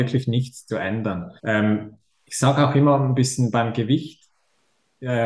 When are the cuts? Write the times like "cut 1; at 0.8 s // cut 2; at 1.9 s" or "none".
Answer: cut 1; at 1.4 s